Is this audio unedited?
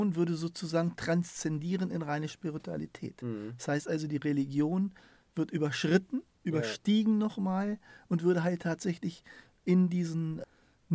yes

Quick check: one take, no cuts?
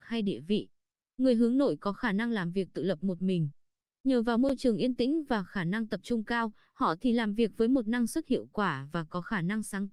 yes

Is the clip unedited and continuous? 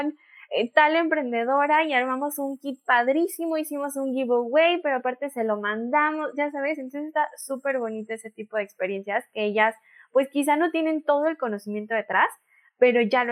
yes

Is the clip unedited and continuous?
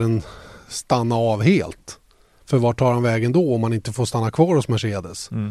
yes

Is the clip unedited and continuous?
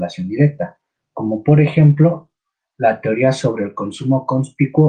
yes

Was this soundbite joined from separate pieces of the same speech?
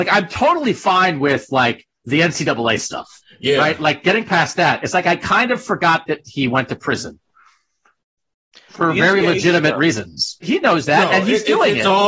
yes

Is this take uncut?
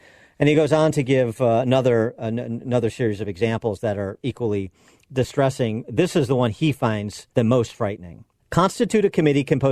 yes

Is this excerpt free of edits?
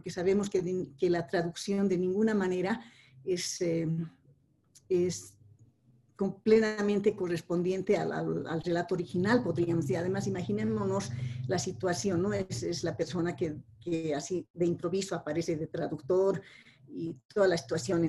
yes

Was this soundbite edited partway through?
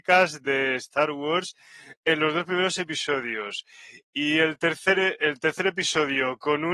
no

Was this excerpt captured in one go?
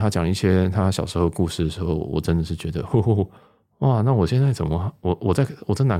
yes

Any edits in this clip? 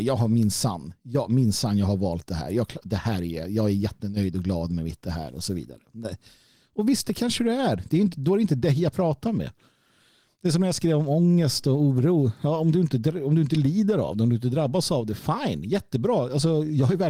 no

